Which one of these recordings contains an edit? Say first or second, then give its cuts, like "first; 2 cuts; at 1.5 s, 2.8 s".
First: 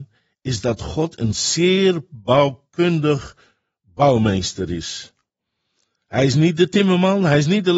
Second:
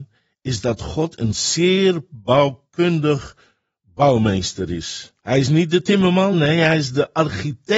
second; 2 cuts; at 5.2 s, 6.3 s